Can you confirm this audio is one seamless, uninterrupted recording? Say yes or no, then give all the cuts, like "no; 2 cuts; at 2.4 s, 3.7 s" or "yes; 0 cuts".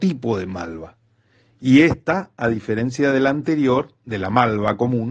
yes; 0 cuts